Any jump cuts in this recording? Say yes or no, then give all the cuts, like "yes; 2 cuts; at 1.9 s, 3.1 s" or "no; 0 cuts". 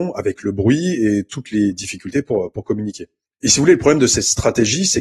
yes; 1 cut; at 3.3 s